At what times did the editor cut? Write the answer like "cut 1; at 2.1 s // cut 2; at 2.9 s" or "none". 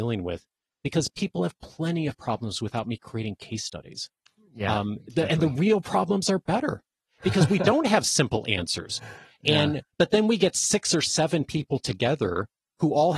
none

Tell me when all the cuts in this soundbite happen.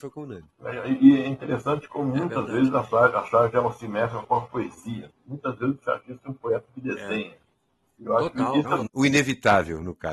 cut 1; at 5.1 s // cut 2; at 8.9 s

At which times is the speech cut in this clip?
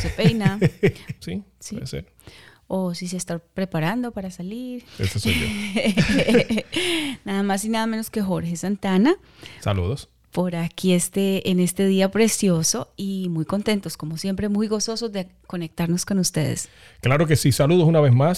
cut 1; at 1.2 s // cut 2; at 4.8 s

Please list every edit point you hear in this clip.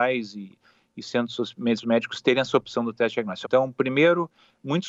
cut 1; at 1.8 s // cut 2; at 3.4 s

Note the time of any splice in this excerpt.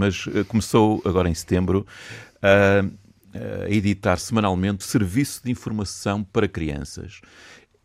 cut 1; at 4.8 s

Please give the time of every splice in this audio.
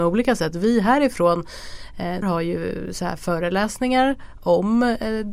cut 1; at 2.2 s

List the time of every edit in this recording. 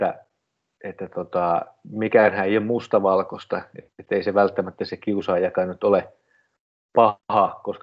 none

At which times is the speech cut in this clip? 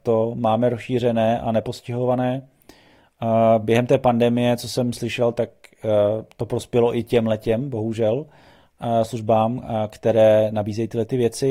none

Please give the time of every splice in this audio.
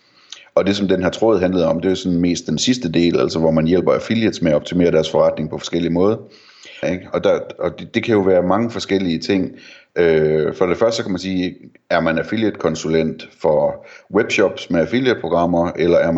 cut 1; at 6.8 s

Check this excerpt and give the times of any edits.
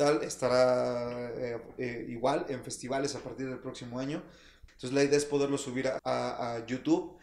cut 1; at 4.7 s // cut 2; at 6.0 s

